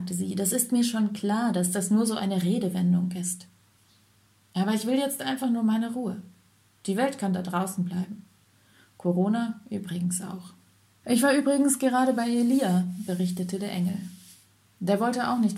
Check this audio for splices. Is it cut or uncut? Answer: cut